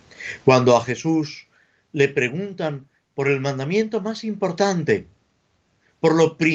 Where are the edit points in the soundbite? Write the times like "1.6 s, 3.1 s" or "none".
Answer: none